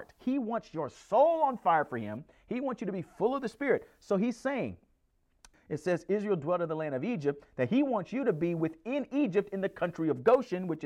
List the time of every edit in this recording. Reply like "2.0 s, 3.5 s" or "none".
5.5 s